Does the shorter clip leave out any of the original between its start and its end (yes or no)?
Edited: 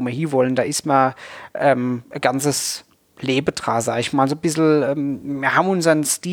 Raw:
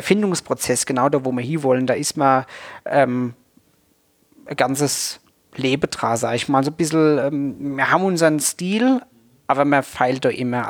yes